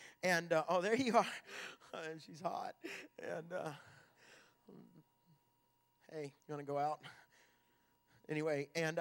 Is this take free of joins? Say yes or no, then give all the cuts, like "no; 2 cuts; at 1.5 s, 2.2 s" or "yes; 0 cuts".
no; 1 cut; at 6.4 s